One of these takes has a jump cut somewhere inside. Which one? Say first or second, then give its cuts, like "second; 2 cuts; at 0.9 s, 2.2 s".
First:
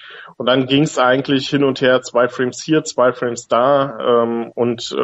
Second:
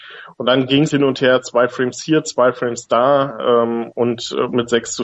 second; 1 cut; at 0.9 s